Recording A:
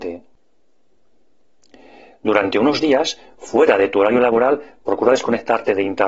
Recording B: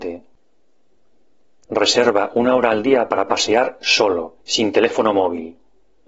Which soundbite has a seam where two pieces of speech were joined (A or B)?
B